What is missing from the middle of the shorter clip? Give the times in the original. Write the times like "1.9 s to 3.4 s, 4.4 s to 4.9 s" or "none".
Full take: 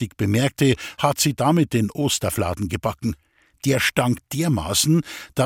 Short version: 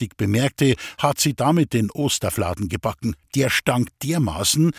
3.2 s to 3.5 s